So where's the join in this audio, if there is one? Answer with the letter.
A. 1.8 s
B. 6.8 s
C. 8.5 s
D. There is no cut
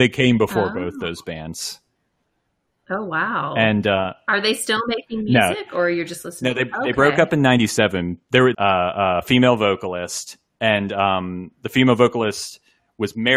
C